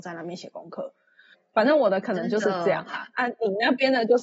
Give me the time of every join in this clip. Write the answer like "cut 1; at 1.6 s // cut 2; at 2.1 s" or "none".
cut 1; at 1.3 s